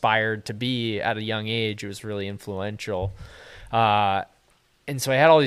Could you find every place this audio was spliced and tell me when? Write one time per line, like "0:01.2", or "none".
none